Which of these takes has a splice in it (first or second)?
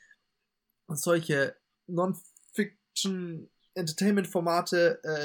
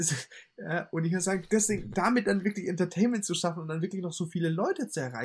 first